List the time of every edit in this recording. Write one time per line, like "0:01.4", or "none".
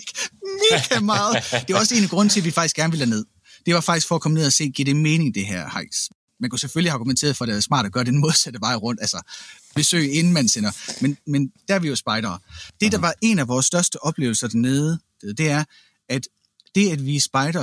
none